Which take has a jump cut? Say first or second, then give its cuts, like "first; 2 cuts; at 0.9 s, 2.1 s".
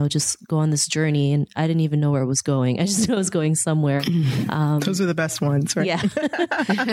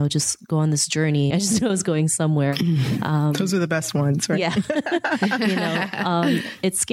second; 1 cut; at 1.3 s